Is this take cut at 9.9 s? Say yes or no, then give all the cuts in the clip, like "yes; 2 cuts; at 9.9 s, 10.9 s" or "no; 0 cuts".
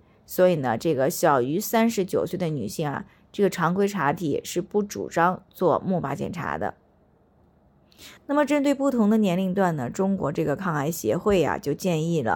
no; 1 cut; at 8.2 s